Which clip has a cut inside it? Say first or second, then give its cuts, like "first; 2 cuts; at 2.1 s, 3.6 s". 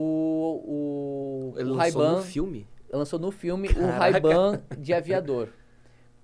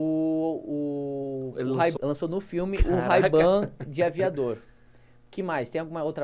second; 1 cut; at 2.0 s